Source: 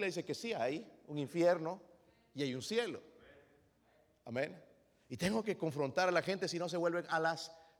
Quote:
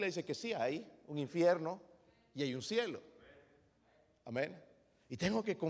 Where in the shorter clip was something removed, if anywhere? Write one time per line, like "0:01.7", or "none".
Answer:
none